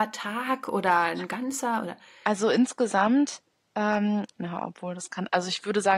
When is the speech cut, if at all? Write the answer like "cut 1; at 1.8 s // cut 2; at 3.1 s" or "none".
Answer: cut 1; at 4.4 s